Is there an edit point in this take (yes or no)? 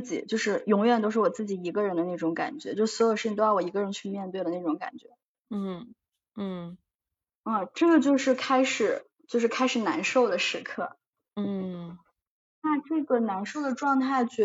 no